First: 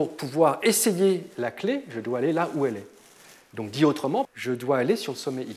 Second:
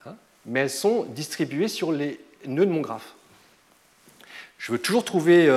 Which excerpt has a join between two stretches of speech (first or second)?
first